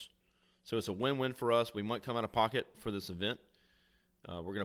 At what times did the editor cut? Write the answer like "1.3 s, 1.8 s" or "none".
none